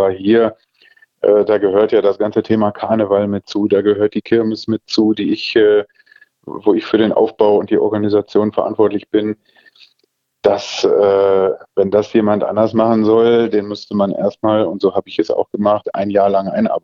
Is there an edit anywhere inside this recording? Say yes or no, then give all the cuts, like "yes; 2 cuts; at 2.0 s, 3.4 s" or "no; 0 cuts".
no; 0 cuts